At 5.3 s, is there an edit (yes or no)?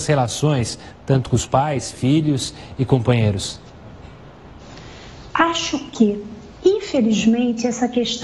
yes